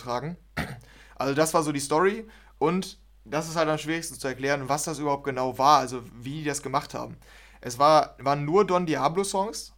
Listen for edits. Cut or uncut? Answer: uncut